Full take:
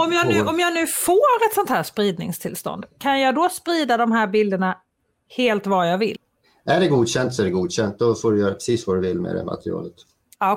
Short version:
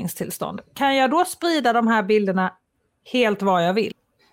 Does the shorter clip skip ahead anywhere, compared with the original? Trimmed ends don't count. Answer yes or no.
no